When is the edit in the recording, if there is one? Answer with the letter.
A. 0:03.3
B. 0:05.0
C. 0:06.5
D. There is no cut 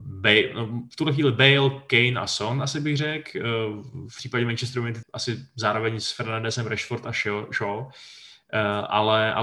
B